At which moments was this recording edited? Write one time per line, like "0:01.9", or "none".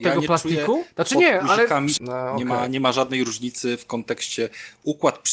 0:02.0